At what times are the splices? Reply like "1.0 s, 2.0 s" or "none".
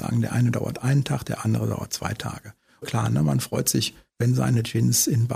2.8 s